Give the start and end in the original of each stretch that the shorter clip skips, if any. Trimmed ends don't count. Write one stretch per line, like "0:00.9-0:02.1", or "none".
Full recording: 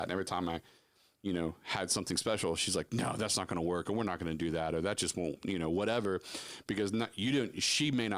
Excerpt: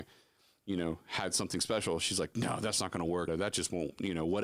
0:03.8-0:04.7